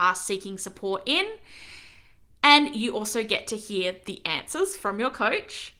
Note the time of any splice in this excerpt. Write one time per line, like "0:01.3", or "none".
none